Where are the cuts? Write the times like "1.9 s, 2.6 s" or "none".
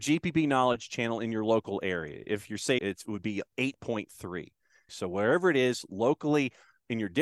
2.8 s, 4.9 s